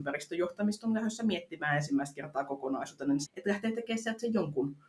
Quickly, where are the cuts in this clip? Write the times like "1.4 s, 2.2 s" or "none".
3.3 s